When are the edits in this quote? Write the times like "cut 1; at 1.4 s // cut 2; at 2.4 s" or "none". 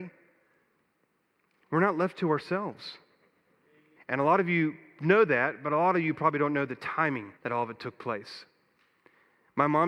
cut 1; at 4.0 s // cut 2; at 7.4 s